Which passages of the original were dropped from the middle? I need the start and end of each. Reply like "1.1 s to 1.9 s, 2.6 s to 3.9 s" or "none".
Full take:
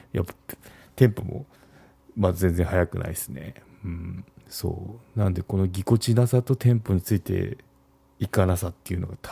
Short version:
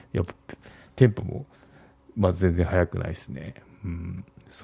none